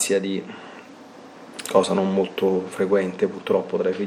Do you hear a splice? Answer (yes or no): yes